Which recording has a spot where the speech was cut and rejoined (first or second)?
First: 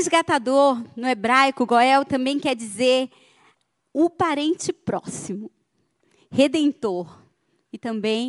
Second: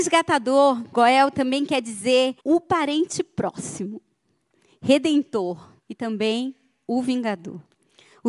second